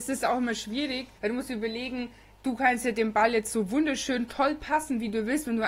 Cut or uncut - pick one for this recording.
cut